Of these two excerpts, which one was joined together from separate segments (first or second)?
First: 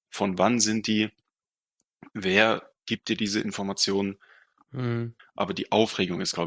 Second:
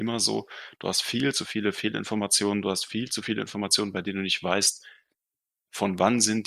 first